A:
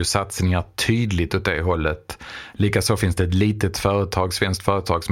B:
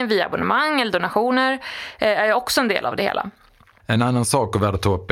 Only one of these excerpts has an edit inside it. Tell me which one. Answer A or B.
B